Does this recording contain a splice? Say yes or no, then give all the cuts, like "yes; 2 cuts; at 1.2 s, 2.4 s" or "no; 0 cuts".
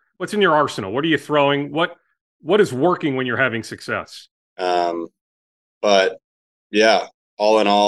yes; 1 cut; at 4.5 s